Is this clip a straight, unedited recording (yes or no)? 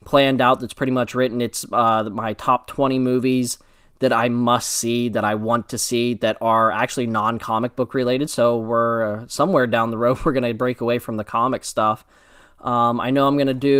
yes